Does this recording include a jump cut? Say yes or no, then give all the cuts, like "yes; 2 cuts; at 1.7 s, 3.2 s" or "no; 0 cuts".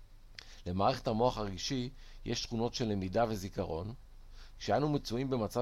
no; 0 cuts